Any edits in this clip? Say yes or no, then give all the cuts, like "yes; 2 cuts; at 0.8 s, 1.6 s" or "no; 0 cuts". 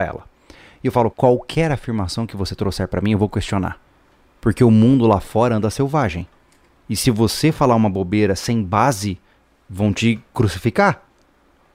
yes; 1 cut; at 1.1 s